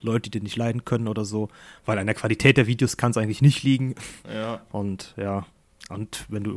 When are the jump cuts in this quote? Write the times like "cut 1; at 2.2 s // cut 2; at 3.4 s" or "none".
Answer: none